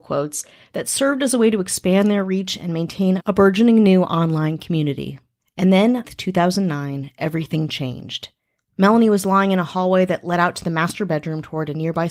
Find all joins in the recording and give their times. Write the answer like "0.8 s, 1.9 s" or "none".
6.0 s, 8.7 s